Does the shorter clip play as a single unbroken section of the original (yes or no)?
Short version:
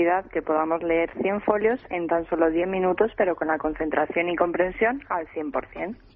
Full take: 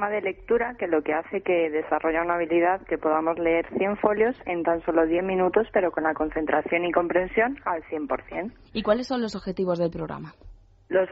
yes